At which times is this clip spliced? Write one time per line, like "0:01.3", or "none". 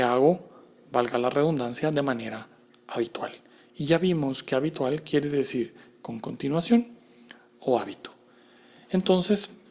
none

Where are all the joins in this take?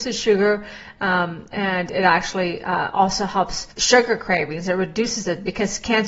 0:03.7

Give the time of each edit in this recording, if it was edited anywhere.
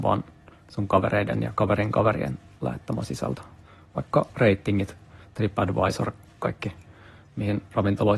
none

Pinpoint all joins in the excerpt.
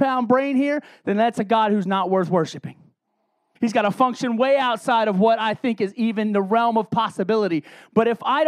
0:03.6

